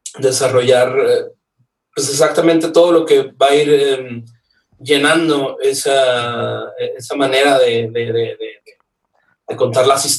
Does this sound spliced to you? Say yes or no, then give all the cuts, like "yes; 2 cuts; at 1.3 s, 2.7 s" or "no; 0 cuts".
no; 0 cuts